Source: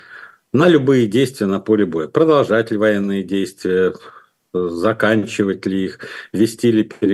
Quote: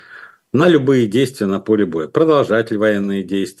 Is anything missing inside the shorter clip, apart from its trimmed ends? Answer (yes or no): no